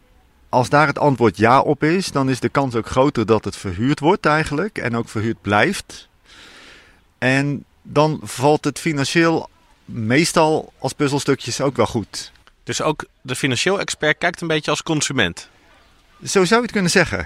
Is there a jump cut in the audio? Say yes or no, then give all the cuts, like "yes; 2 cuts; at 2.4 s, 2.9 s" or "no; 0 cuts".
no; 0 cuts